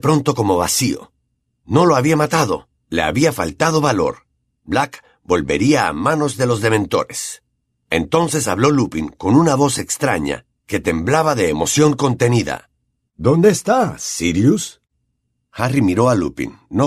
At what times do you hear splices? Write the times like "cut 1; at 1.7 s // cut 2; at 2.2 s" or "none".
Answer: none